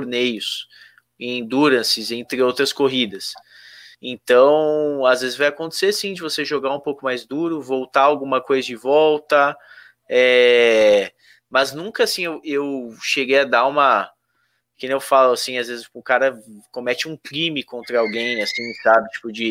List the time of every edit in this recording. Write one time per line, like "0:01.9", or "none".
none